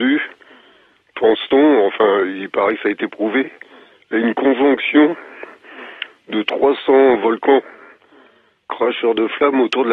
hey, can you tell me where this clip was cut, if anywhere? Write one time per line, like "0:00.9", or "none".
none